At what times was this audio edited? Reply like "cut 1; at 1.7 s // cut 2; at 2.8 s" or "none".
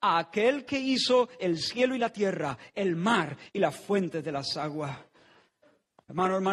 none